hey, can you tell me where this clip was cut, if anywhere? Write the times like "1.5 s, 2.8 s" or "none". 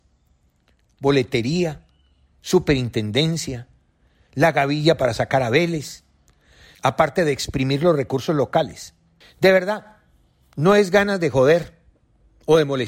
6.7 s, 9.2 s